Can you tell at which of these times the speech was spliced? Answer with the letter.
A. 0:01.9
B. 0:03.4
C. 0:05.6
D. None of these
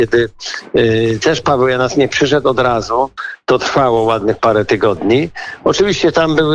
D